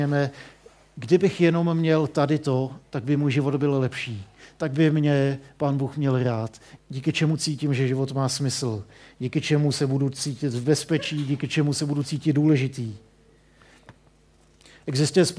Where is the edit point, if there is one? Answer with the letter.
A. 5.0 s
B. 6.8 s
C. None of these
B